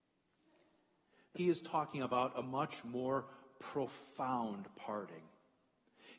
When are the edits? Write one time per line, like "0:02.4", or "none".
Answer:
0:01.4